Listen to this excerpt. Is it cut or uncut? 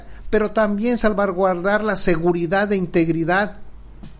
uncut